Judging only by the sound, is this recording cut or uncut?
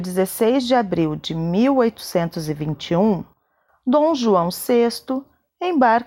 uncut